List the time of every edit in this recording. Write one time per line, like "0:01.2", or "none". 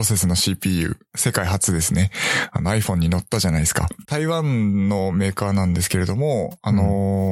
0:04.1